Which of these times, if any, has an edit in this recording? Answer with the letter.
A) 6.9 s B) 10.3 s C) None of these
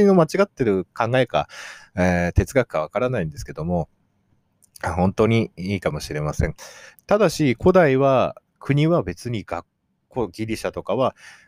A